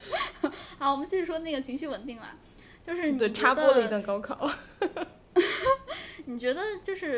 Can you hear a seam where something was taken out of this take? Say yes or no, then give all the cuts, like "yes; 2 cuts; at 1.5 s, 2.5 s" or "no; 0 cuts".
no; 0 cuts